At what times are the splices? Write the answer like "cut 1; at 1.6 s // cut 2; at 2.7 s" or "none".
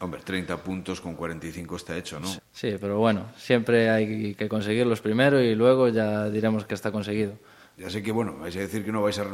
cut 1; at 2.4 s // cut 2; at 4.3 s // cut 3; at 7.7 s